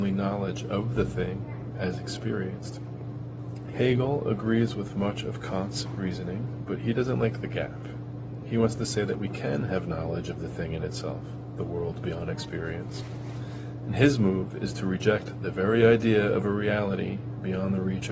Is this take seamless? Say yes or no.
no